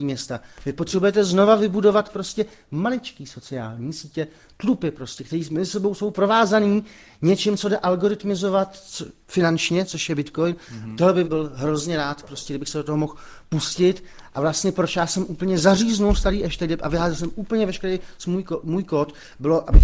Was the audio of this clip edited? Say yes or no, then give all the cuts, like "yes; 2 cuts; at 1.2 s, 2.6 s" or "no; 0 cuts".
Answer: yes; 1 cut; at 11.2 s